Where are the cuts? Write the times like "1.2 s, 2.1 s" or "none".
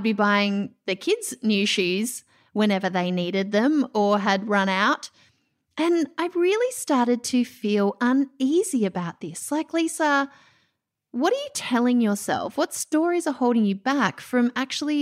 none